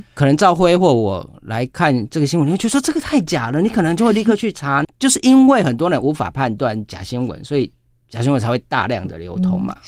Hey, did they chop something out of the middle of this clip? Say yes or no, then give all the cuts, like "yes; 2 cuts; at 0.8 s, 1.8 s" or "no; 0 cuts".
no; 0 cuts